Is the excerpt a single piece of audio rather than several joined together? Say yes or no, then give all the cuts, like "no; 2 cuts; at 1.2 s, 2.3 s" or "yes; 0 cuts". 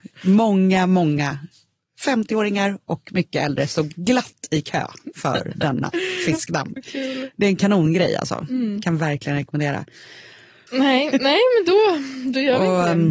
no; 2 cuts; at 6.8 s, 10.7 s